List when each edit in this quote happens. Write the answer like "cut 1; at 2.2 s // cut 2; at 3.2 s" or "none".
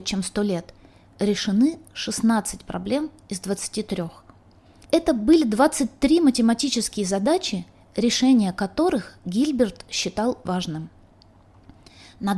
cut 1; at 4.8 s // cut 2; at 10.5 s